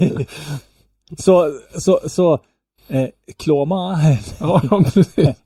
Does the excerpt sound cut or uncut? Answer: uncut